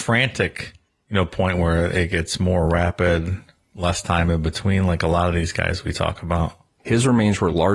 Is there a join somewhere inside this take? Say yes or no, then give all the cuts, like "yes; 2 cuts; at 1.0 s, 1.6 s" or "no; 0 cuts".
yes; 1 cut; at 6.8 s